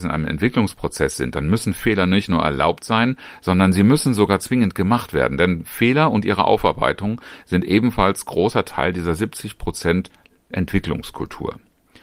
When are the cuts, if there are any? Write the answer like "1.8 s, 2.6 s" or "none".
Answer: none